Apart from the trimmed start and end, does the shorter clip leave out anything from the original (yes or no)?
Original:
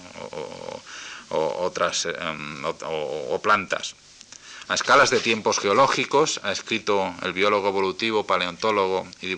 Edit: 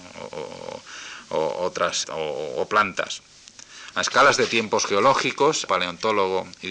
yes